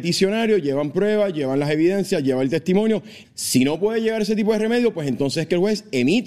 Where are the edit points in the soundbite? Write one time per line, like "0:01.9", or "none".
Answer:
0:03.2